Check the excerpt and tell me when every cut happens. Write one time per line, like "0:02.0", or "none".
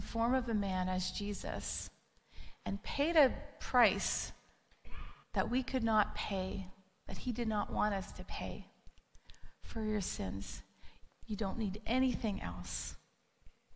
0:05.2
0:11.1